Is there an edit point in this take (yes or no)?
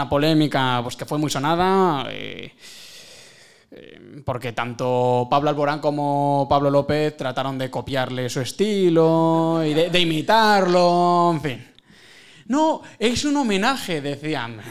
no